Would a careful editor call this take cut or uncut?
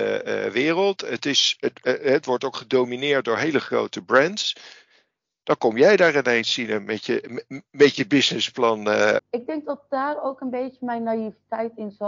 cut